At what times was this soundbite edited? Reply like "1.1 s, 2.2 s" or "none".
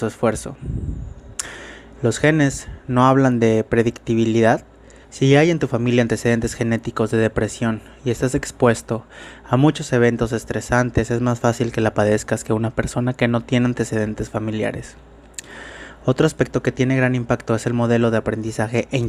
2.0 s, 5.0 s